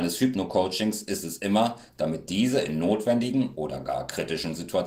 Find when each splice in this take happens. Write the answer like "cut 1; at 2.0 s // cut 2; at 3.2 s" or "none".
cut 1; at 1.9 s